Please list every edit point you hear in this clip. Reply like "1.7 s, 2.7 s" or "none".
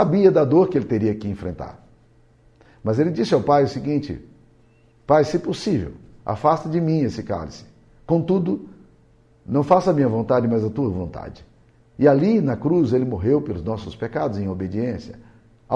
11.8 s